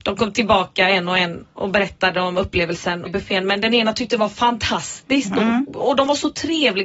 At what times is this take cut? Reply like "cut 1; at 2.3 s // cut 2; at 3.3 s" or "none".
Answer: cut 1; at 3.1 s

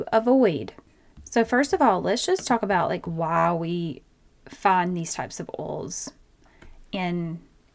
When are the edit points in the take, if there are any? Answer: none

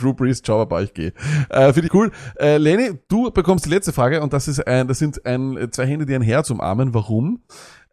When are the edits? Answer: cut 1; at 1.9 s

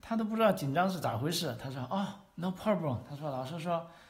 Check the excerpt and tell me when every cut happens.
none

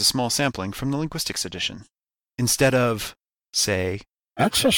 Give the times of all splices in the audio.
cut 1; at 3.5 s

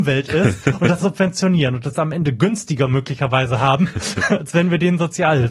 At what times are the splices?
cut 1; at 1.0 s // cut 2; at 4.3 s

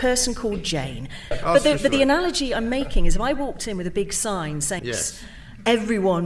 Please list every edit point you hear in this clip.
cut 1; at 1.3 s // cut 2; at 4.8 s

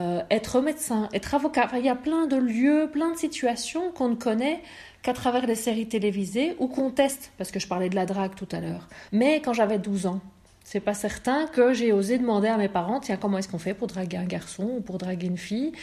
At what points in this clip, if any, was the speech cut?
cut 1; at 9.1 s

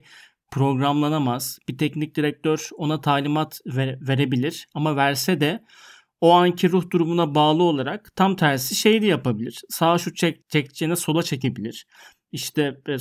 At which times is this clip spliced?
cut 1; at 10.4 s

